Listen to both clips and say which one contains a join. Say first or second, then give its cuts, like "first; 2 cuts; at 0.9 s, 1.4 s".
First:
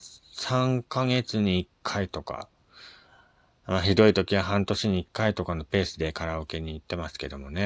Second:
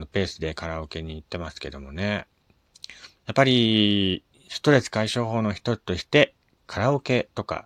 second; 1 cut; at 3.2 s